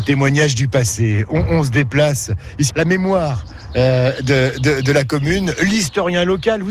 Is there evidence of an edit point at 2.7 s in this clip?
yes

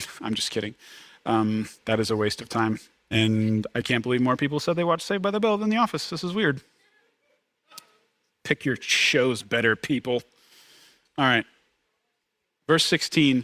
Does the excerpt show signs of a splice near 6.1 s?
no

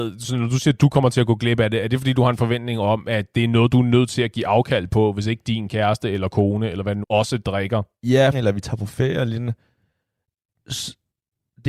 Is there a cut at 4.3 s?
no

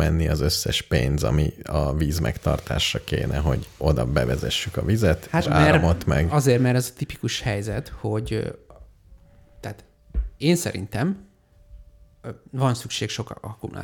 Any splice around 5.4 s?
yes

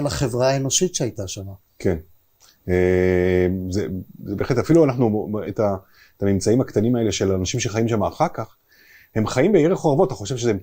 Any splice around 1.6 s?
no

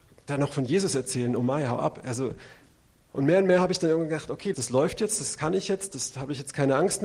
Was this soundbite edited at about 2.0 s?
no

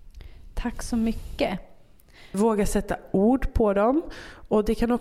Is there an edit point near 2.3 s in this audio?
yes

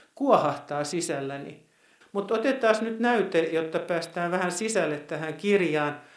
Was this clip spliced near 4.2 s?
no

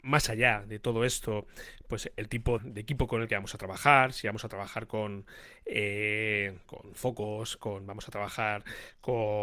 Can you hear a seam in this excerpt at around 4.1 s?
no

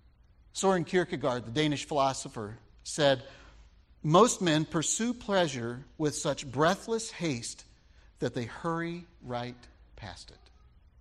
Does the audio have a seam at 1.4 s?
no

